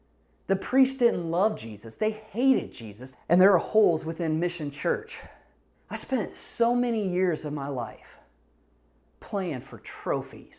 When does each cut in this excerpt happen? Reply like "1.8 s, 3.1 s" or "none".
3.1 s, 5.7 s